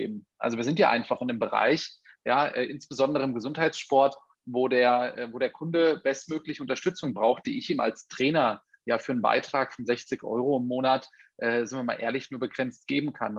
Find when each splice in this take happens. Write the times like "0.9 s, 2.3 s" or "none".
none

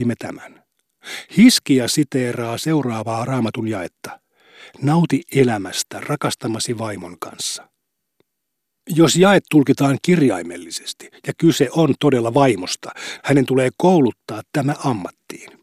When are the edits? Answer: 13.2 s

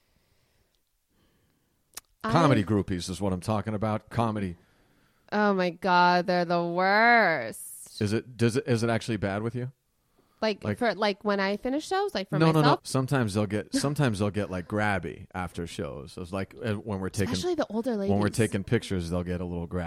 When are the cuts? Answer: 12.8 s

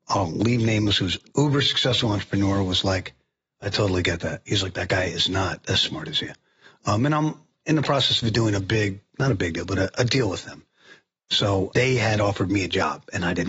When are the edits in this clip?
none

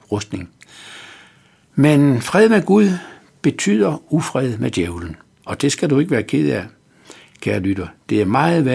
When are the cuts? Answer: 1.6 s

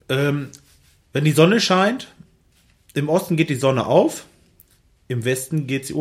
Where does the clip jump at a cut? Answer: 1.0 s

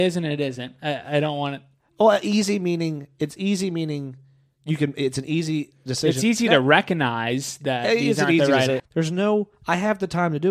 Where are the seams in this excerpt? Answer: 8.8 s

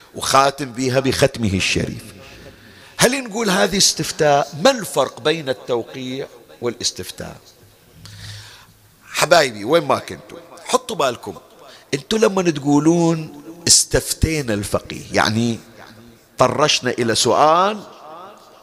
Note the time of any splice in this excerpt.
none

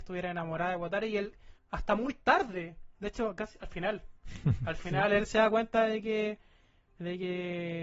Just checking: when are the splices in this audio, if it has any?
1.6 s, 2.9 s

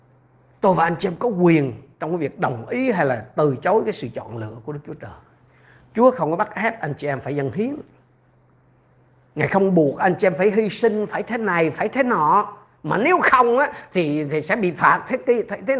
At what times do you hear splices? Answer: none

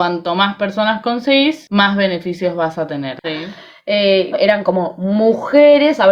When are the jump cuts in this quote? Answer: 3.2 s, 4.3 s

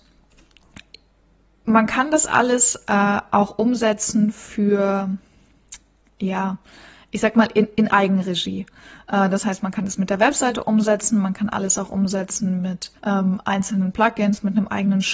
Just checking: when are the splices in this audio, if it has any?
13.0 s

